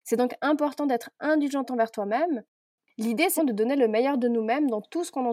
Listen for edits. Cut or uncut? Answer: cut